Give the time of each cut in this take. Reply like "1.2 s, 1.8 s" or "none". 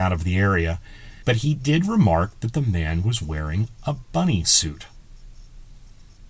1.2 s

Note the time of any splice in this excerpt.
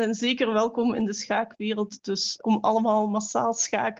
2.4 s

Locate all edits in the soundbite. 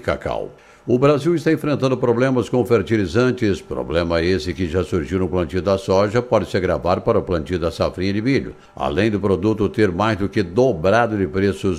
none

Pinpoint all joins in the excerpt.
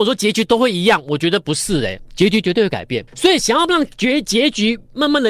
3.1 s

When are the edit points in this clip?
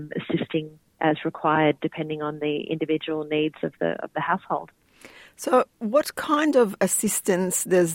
none

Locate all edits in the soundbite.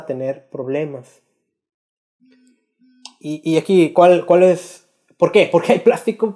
none

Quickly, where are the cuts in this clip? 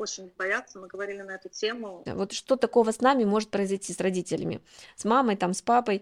2.1 s

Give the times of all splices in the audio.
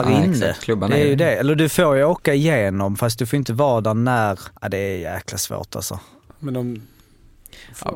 4.6 s

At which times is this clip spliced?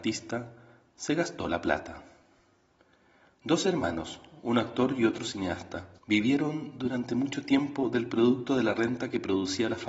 6.0 s

